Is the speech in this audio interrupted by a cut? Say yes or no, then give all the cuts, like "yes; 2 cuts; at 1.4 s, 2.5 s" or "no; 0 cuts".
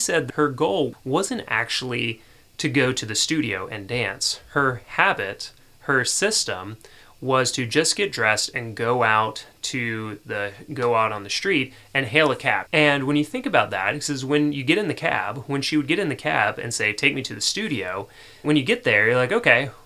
yes; 2 cuts; at 12.7 s, 18.4 s